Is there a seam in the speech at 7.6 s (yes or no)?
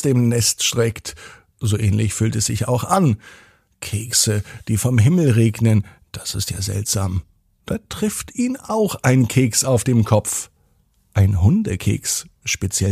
yes